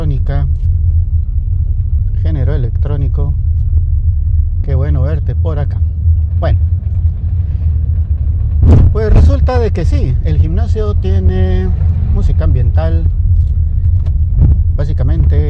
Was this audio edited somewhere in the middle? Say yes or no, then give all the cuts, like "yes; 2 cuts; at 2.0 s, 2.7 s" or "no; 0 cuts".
yes; 1 cut; at 4.6 s